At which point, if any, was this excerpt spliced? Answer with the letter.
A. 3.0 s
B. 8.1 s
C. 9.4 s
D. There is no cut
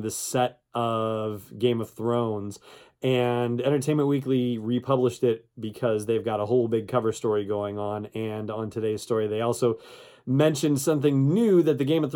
D